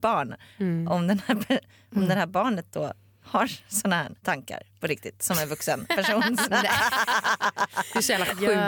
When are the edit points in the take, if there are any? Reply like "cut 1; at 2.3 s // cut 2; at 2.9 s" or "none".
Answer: cut 1; at 4.2 s